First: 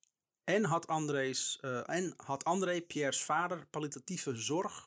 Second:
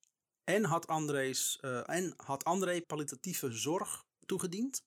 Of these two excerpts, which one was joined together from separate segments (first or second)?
second